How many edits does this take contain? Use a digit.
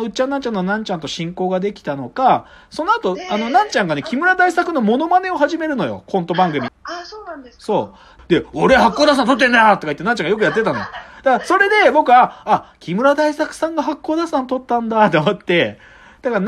2